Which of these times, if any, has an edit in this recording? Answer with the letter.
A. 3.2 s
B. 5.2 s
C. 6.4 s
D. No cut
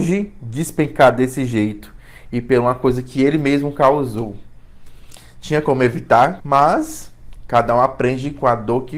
C